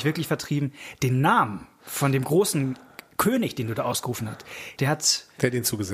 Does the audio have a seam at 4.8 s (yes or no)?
yes